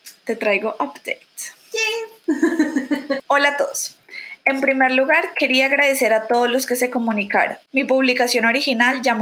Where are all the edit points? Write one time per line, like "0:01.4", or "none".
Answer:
0:03.2